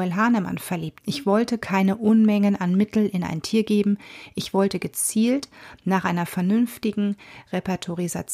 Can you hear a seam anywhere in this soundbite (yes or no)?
yes